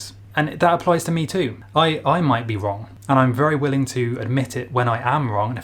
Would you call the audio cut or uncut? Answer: uncut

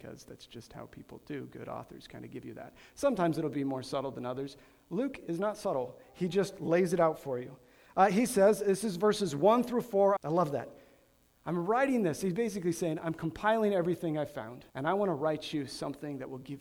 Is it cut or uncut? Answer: cut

